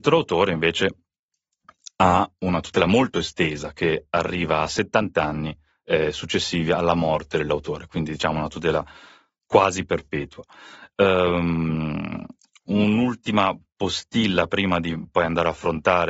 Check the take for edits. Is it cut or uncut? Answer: uncut